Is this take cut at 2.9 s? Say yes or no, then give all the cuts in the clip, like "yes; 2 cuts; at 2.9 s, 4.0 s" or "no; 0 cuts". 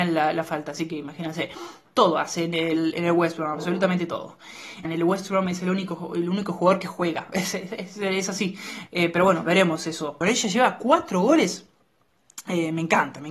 no; 3 cuts; at 4.8 s, 8.9 s, 10.2 s